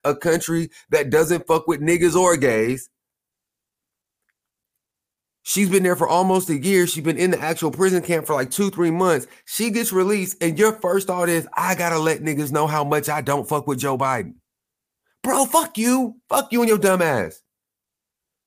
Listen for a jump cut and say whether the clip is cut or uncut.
uncut